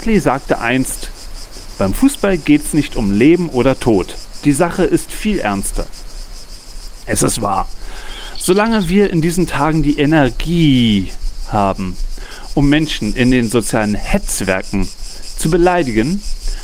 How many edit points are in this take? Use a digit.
0